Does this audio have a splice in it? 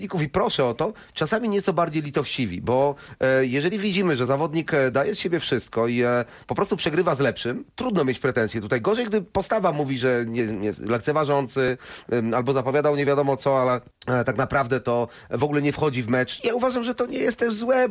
yes; 1 cut; at 16.4 s

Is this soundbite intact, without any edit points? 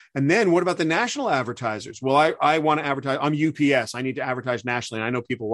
yes; 0 cuts

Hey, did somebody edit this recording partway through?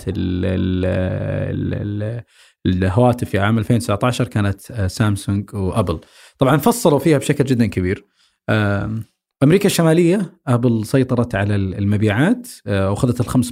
no; 0 cuts

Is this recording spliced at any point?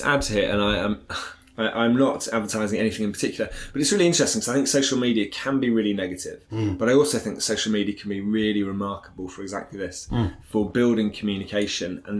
no; 0 cuts

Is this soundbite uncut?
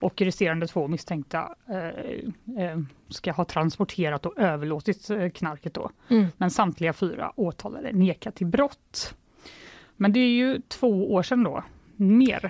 yes; 0 cuts

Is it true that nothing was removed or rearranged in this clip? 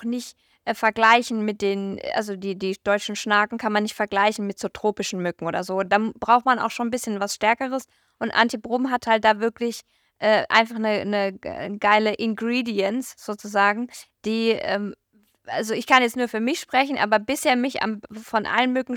yes; 0 cuts

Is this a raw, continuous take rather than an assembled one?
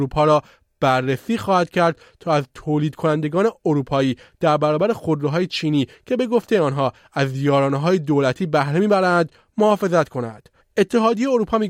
no; 1 cut; at 10.6 s

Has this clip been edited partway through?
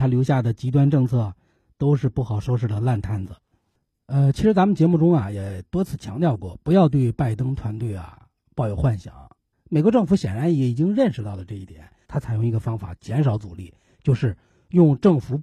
yes; 2 cuts; at 9.5 s, 12.0 s

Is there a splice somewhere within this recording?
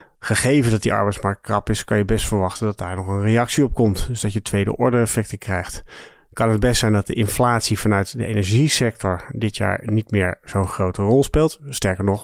no; 0 cuts

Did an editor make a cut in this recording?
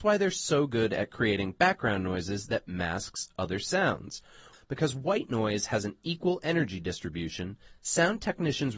yes; 1 cut; at 4.5 s

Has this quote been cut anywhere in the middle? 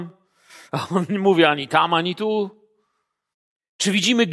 no; 0 cuts

